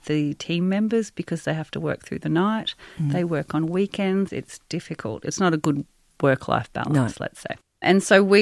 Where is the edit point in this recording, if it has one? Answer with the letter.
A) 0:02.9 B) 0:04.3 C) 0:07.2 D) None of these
B